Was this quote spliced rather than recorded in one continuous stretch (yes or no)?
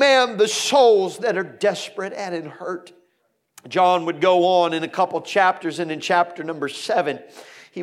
no